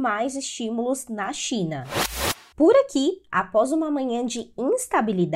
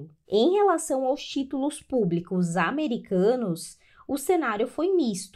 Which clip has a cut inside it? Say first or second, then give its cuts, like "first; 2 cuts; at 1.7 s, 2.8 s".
first; 1 cut; at 2.5 s